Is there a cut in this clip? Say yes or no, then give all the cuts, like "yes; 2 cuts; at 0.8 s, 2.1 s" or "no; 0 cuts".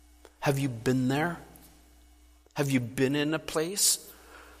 no; 0 cuts